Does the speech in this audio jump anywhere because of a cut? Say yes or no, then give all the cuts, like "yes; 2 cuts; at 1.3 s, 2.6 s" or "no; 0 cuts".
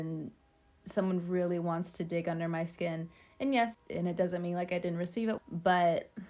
yes; 2 cuts; at 3.7 s, 5.4 s